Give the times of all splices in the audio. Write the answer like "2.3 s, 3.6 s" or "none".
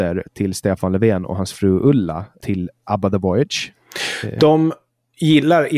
none